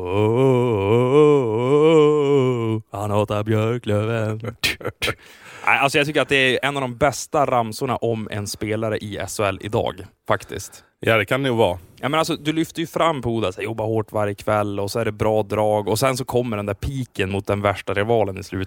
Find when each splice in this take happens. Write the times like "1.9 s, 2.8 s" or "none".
none